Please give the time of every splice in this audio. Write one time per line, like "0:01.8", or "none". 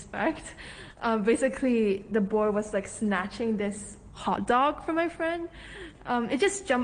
none